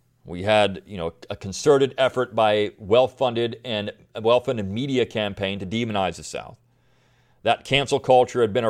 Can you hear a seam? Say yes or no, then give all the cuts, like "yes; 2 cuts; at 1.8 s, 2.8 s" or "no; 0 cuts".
no; 0 cuts